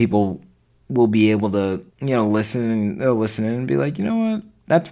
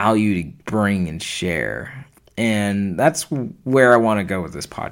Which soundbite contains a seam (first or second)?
first